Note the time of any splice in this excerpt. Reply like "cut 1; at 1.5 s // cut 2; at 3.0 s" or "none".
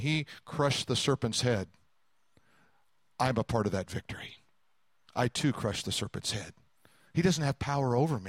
none